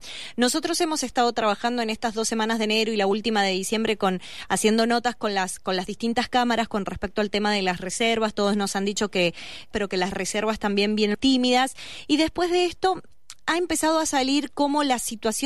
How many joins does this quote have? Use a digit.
2